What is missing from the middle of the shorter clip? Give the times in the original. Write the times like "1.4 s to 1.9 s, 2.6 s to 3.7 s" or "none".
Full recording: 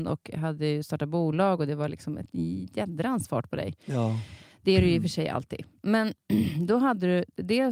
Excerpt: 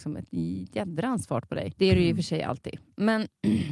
3.8 s to 4.6 s